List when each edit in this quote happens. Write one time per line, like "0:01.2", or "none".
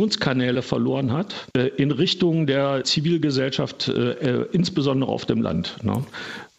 0:01.5
0:02.8